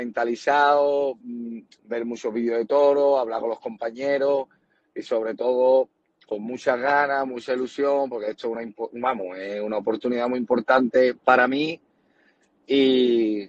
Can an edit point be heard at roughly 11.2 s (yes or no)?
yes